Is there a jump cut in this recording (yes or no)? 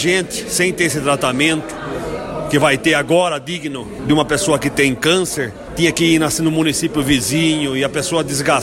no